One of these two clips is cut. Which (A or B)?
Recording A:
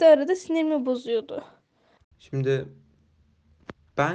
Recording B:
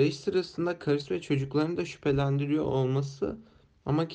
A